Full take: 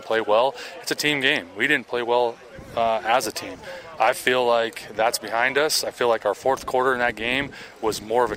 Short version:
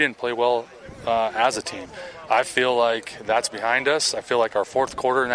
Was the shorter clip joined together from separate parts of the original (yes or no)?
no